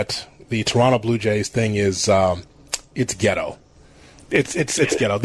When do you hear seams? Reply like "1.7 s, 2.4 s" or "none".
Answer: none